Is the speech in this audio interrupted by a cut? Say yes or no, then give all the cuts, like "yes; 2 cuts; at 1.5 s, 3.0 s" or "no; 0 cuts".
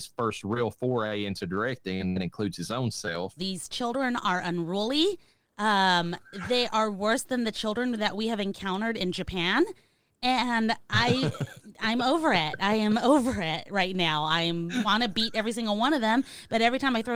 yes; 1 cut; at 3.4 s